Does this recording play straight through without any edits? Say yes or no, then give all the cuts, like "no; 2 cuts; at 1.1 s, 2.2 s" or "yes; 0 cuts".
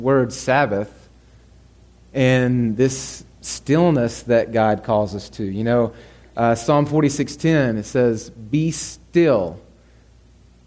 yes; 0 cuts